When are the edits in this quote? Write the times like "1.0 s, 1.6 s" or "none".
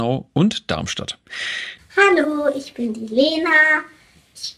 1.8 s